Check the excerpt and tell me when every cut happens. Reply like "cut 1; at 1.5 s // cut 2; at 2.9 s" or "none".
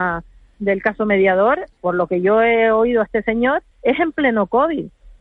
cut 1; at 1.8 s // cut 2; at 3.7 s